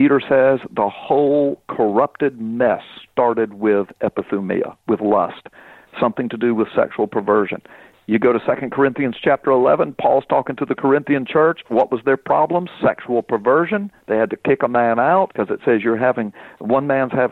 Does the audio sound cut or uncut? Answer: cut